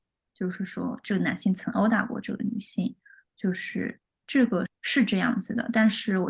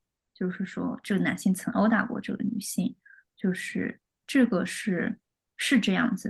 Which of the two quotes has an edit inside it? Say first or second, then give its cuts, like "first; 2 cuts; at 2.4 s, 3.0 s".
first; 1 cut; at 4.7 s